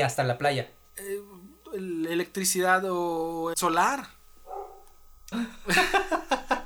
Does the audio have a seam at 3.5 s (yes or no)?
yes